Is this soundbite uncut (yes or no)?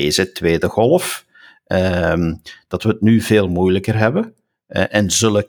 yes